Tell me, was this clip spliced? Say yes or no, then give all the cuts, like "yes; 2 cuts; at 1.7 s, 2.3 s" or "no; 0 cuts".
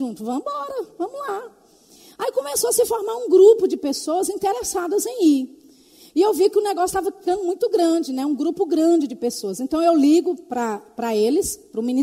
no; 0 cuts